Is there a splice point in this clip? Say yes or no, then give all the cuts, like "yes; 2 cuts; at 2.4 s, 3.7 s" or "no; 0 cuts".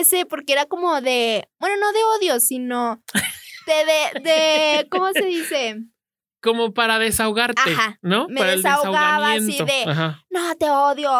no; 0 cuts